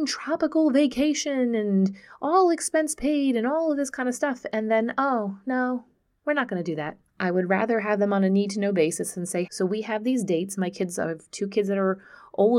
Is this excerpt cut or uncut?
cut